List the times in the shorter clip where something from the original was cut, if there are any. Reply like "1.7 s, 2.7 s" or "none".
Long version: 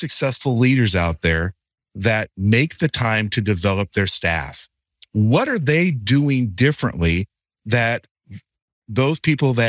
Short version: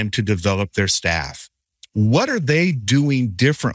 none